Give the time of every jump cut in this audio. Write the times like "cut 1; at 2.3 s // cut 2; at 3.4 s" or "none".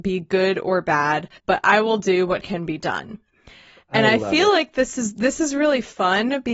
cut 1; at 1.4 s